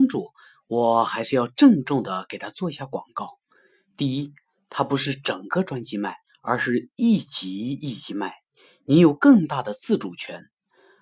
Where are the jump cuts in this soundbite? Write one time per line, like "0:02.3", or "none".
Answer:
none